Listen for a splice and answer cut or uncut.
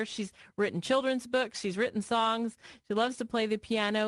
uncut